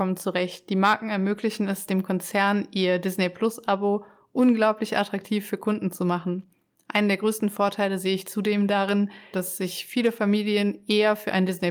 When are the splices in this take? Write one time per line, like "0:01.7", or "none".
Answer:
0:09.3